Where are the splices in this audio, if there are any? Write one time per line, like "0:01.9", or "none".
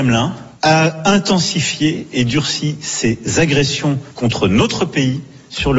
none